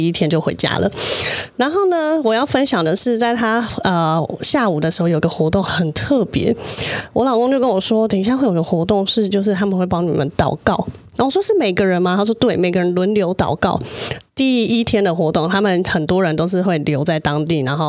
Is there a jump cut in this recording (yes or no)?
yes